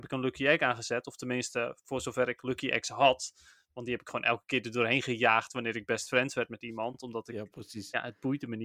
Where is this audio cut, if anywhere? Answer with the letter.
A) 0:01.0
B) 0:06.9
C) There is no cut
C